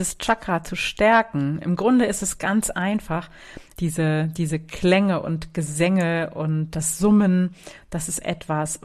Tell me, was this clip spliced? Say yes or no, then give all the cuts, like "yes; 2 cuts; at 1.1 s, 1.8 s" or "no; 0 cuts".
yes; 1 cut; at 3.7 s